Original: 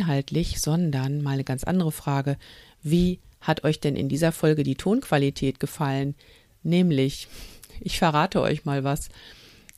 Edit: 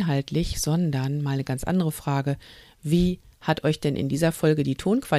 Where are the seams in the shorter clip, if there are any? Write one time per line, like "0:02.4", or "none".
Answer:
none